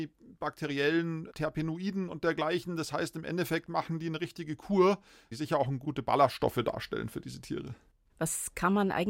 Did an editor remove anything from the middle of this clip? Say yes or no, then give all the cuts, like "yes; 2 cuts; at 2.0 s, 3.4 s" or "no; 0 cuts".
yes; 1 cut; at 5.3 s